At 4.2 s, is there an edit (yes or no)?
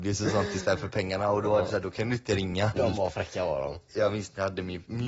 no